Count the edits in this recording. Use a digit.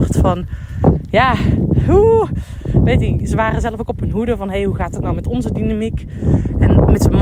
0